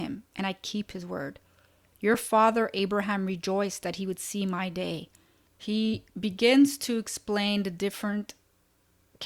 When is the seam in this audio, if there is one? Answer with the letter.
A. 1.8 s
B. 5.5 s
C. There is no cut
B